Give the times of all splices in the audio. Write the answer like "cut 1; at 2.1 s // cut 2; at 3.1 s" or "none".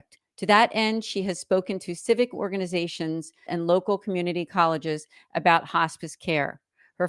cut 1; at 3.5 s

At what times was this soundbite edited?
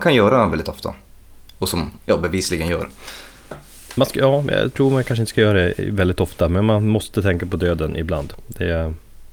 none

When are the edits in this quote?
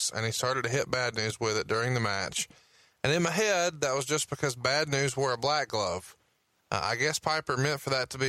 none

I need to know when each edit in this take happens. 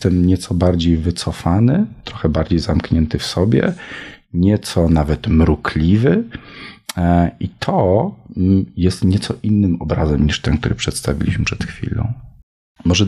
none

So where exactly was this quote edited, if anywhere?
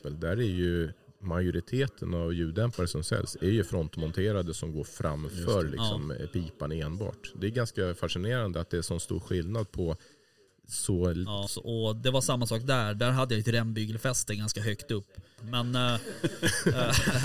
cut 1; at 11.5 s // cut 2; at 15.4 s

